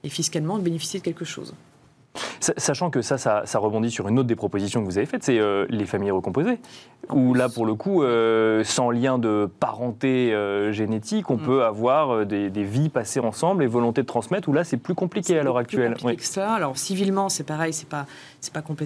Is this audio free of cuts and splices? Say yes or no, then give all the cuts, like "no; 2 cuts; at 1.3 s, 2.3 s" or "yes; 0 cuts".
yes; 0 cuts